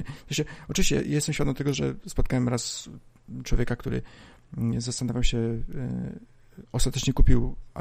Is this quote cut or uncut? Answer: uncut